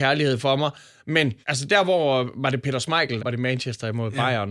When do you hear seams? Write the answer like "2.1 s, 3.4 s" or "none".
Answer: 1.4 s, 3.2 s